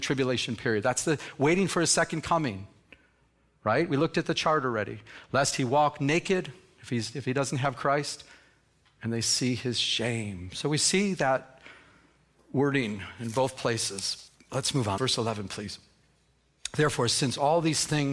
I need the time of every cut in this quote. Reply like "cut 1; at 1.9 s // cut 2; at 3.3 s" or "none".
cut 1; at 15.0 s